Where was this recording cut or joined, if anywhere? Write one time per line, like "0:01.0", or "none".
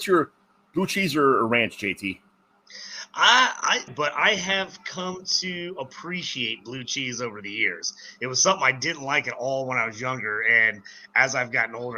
0:03.9